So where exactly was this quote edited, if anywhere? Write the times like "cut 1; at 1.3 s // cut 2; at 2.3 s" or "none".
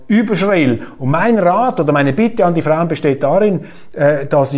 none